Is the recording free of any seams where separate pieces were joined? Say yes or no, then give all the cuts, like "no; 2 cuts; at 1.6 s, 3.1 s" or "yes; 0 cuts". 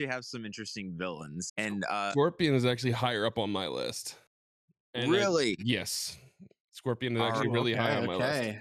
no; 1 cut; at 1.5 s